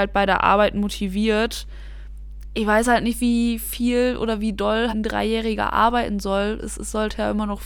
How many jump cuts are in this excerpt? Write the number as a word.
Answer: one